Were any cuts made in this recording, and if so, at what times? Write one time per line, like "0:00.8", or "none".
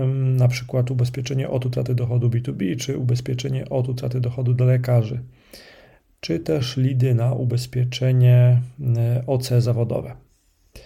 none